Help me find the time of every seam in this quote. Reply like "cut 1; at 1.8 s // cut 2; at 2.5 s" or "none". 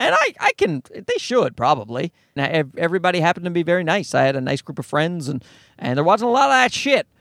cut 1; at 2.4 s